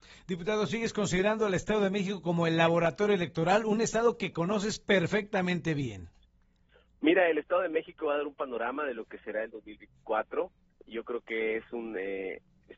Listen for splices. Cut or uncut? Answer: uncut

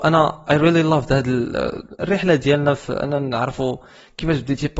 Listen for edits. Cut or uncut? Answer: uncut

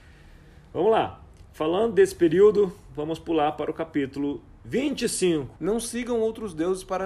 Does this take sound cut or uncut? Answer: cut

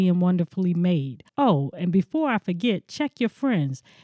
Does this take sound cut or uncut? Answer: cut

